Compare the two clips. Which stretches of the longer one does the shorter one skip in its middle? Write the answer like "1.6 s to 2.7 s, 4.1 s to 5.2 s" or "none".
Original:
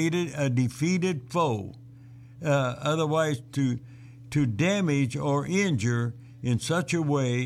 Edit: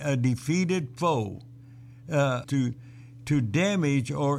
2.8 s to 3.5 s